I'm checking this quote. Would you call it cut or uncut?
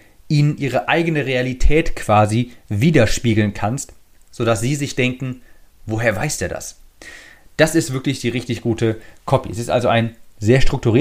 uncut